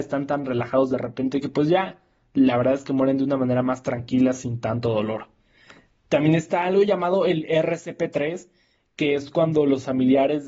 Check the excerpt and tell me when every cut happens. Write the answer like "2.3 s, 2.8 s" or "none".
none